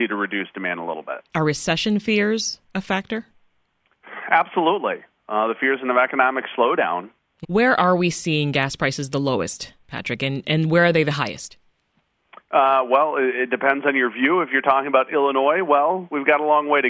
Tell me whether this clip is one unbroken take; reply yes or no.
no